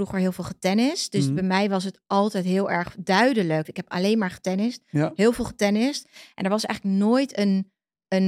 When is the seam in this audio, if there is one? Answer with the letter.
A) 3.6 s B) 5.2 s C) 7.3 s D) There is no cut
A